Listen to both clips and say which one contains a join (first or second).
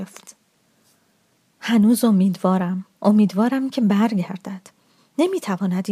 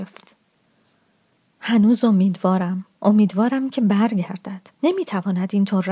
second